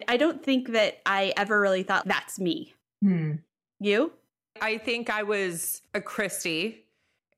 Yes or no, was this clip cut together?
yes